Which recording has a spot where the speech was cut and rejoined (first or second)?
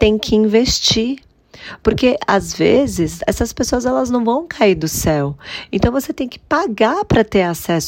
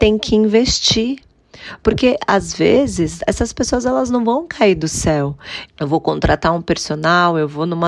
second